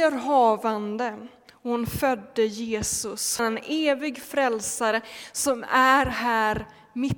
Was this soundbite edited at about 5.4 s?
no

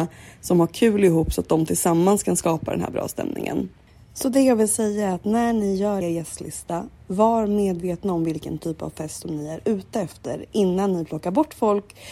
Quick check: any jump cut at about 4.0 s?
no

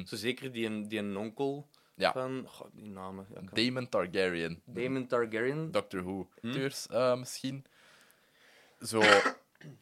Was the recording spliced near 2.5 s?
yes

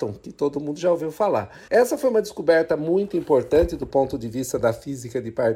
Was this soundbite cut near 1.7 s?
yes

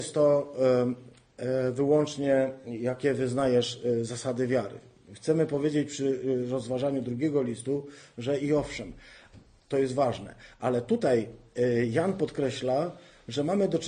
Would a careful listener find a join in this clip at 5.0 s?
no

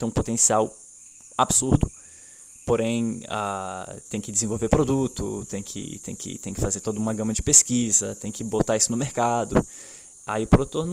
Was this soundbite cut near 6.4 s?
no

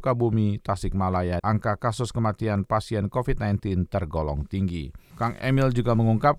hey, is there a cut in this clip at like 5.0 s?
no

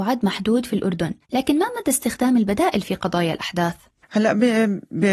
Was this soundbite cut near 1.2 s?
yes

